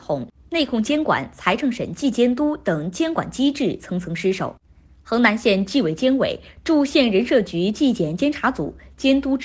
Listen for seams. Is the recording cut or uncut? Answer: uncut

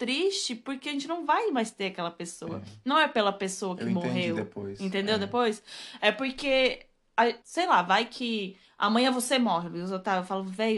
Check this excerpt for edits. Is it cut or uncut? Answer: cut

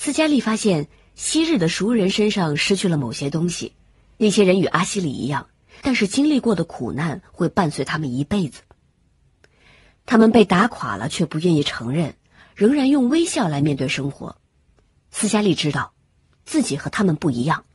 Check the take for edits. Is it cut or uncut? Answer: cut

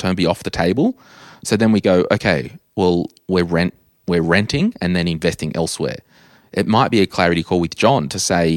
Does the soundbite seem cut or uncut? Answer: uncut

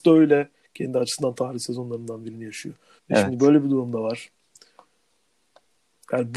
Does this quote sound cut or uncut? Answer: cut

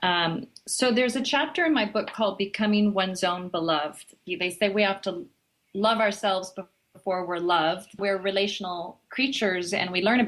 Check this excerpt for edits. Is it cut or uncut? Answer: cut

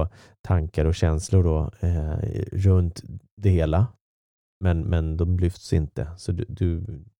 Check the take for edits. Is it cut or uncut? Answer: uncut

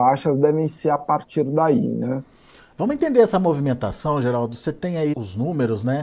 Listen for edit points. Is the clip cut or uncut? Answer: cut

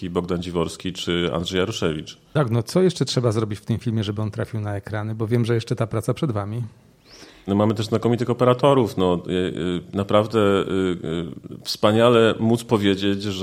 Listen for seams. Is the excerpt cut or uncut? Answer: cut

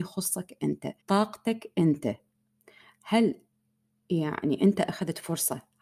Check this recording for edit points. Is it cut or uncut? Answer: cut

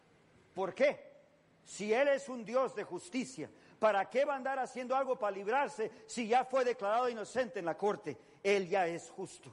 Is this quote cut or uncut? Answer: uncut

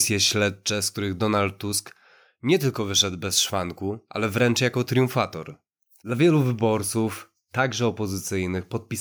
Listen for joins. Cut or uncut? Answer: uncut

